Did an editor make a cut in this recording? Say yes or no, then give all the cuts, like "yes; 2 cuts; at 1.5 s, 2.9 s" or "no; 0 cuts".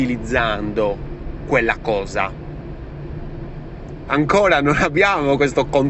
yes; 1 cut; at 4.1 s